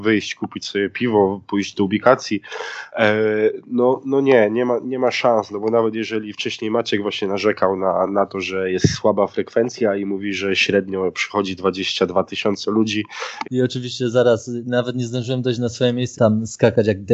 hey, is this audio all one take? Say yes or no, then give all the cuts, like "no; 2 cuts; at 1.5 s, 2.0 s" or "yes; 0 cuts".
no; 2 cuts; at 13.4 s, 16.1 s